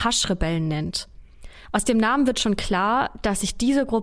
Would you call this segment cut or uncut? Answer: uncut